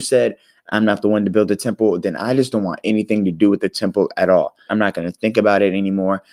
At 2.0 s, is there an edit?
no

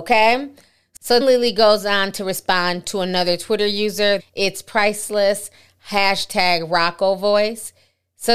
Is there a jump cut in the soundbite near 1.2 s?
yes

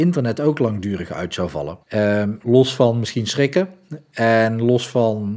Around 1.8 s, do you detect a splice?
yes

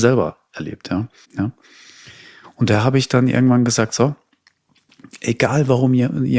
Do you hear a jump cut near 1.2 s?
yes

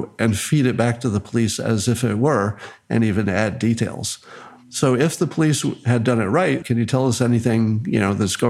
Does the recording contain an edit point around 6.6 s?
yes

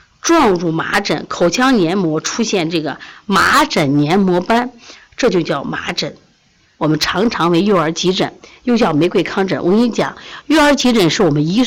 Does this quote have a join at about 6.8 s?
yes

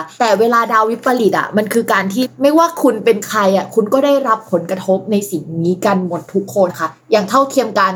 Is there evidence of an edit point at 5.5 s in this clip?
no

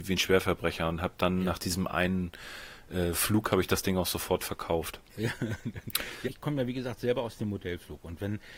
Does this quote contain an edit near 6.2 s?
yes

